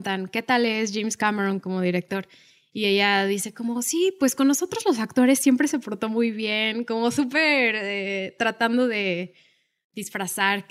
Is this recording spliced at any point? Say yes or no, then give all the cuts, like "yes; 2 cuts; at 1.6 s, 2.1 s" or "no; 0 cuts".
no; 0 cuts